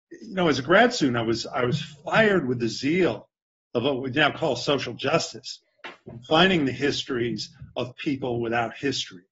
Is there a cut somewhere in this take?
no; 0 cuts

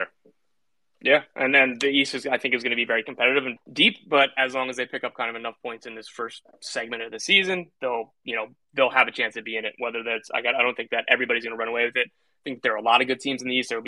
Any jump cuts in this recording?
yes; 1 cut; at 3.6 s

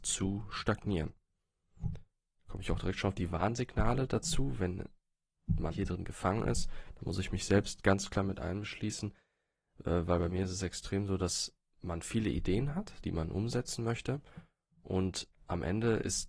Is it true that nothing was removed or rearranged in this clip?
no; 1 cut; at 5.7 s

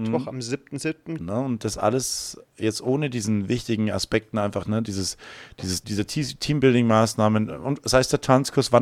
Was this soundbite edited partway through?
yes; 2 cuts; at 1.2 s, 5.8 s

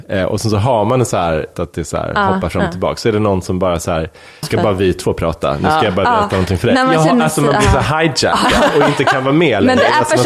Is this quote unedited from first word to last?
no; 2 cuts; at 1.5 s, 4.4 s

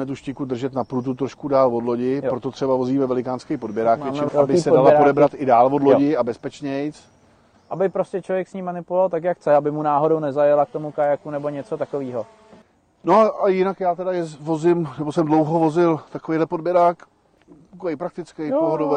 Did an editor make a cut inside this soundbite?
yes; 1 cut; at 4.3 s

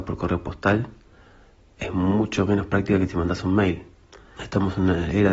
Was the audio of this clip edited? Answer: yes; 1 cut; at 4.4 s

